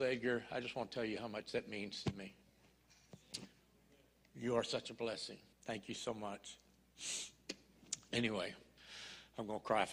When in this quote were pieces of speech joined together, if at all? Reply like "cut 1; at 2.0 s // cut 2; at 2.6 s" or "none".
cut 1; at 5.5 s